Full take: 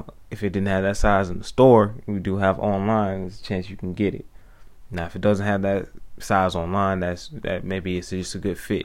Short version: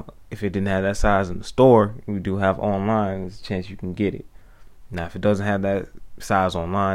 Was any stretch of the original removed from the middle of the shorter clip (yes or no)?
no